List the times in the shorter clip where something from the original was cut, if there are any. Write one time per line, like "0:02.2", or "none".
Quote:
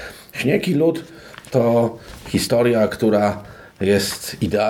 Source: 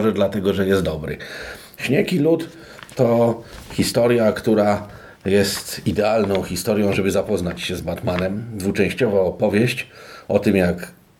none